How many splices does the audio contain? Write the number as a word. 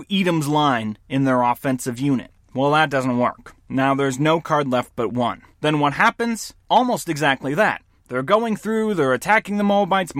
one